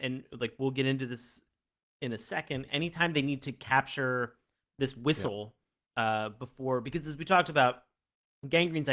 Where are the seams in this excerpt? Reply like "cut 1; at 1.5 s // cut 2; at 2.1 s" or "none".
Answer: cut 1; at 2.7 s